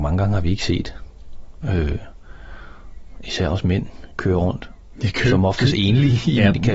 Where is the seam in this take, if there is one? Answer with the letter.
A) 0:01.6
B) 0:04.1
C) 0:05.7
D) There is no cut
B